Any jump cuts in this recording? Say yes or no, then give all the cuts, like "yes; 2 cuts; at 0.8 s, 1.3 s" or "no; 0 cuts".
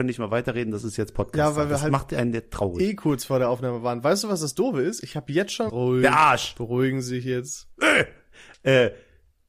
yes; 1 cut; at 5.7 s